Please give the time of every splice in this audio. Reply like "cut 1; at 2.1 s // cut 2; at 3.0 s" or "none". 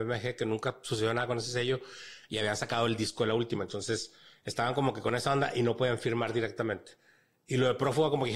none